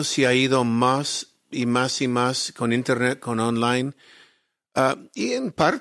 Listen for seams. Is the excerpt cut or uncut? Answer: uncut